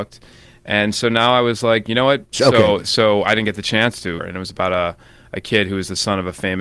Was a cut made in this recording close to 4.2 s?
yes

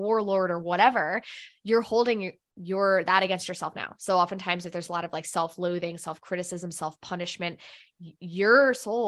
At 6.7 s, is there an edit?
no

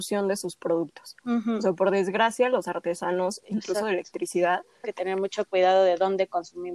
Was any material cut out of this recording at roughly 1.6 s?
no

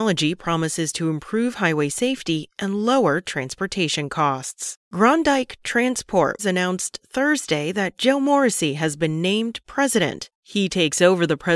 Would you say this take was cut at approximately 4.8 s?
yes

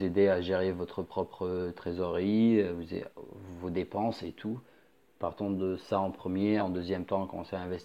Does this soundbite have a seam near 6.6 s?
yes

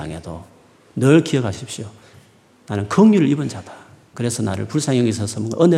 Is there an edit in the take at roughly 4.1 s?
yes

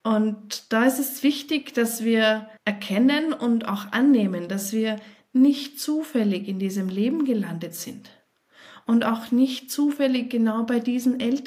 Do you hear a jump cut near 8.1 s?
no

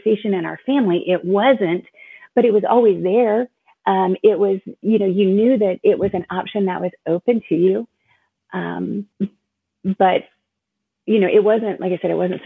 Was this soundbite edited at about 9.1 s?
yes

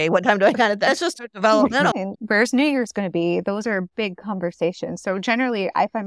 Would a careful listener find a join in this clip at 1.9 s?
yes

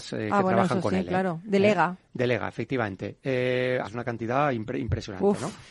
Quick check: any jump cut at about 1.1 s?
no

